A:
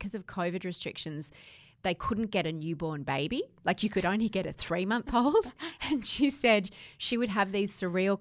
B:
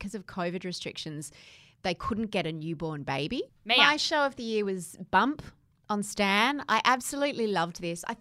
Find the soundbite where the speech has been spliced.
B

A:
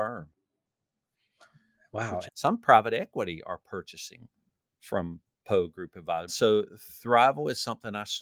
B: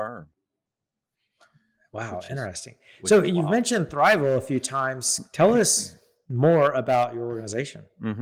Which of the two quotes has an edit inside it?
A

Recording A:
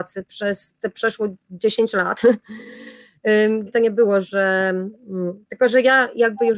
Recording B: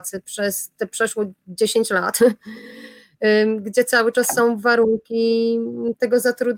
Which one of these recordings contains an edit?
A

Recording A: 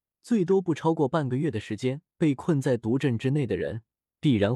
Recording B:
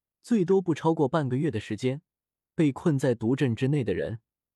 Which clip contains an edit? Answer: A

